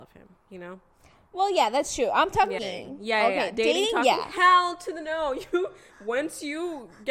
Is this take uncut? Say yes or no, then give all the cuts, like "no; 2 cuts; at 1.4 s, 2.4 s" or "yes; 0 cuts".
no; 1 cut; at 2.6 s